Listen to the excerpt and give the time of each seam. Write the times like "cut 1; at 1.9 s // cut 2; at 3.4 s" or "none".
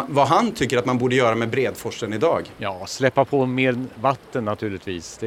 cut 1; at 2.6 s